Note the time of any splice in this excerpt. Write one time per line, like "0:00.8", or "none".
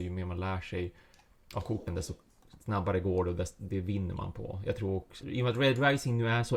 0:05.2